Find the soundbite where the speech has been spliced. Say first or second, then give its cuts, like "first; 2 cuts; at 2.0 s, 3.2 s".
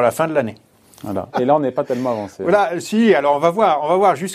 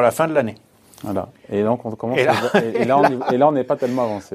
first; 1 cut; at 1.3 s